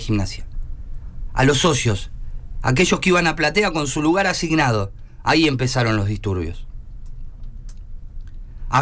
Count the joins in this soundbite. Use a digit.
0